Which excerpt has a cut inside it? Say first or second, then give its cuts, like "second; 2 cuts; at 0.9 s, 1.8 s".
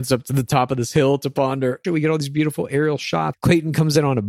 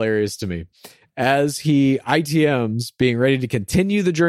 first; 2 cuts; at 1.8 s, 3.3 s